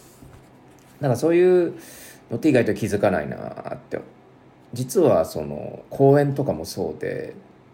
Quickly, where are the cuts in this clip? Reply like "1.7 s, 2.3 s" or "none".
4.7 s